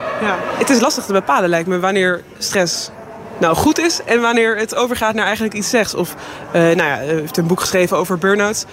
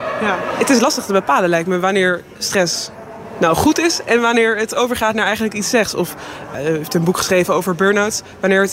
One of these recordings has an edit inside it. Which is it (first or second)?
second